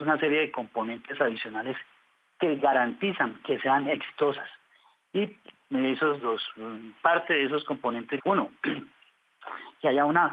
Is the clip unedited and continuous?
no; 2 cuts; at 6.2 s, 8.2 s

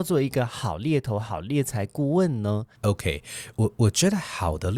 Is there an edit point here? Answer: yes; 1 cut; at 2.7 s

